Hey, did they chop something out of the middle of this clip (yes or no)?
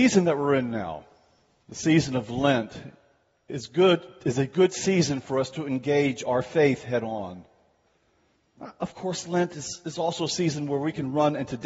no